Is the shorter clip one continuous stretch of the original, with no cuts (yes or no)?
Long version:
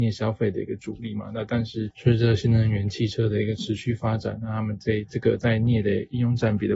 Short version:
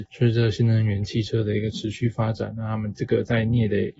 no